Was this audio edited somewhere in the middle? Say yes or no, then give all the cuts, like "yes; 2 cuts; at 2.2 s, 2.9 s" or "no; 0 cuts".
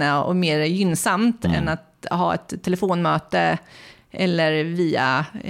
no; 0 cuts